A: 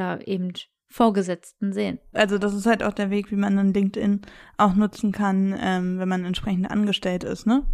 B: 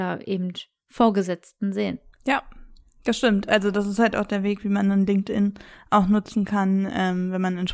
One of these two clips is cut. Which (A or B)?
A